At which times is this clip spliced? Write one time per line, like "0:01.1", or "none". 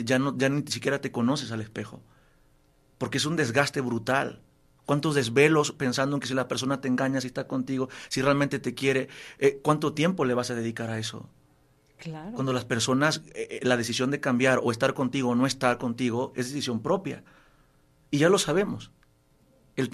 0:07.2